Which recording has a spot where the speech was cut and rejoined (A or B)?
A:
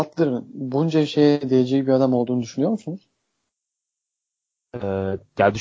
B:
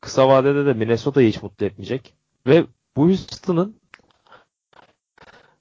B